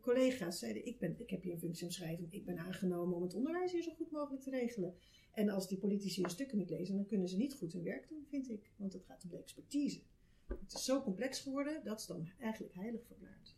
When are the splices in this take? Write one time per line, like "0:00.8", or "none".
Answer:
none